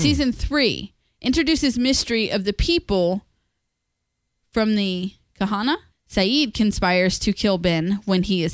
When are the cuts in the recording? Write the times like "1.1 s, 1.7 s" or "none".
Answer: 5.9 s